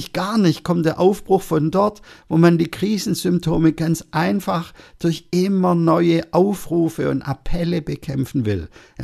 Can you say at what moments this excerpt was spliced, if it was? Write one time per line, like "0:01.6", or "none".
none